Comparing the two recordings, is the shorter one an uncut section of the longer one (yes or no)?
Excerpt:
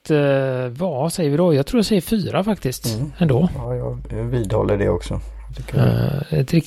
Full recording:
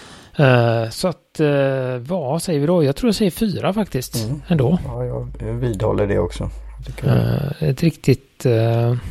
yes